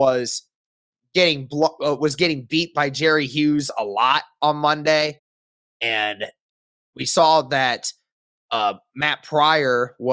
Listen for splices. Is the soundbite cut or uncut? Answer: uncut